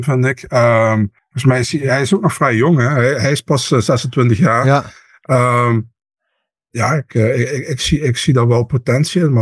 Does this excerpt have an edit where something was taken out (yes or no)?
yes